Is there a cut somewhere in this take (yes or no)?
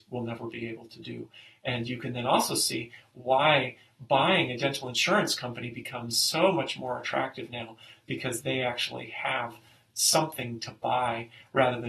no